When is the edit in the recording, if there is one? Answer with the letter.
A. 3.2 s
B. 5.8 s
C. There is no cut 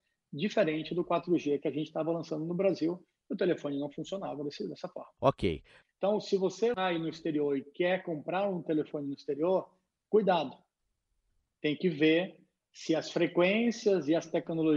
B